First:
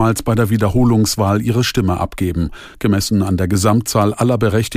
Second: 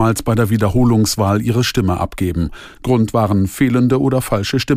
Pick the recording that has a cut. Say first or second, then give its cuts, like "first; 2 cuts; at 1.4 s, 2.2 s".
second; 1 cut; at 2.7 s